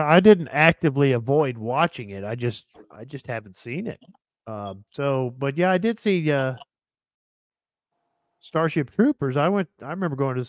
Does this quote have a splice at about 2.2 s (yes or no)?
no